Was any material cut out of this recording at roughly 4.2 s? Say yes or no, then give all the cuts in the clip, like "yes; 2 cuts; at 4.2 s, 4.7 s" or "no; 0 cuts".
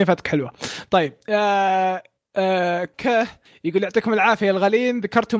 no; 1 cut; at 2.9 s